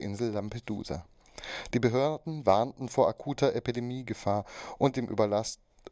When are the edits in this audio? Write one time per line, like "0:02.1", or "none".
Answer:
0:01.7